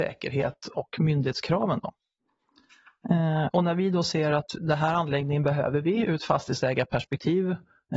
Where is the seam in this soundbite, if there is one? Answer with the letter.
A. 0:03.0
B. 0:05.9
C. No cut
C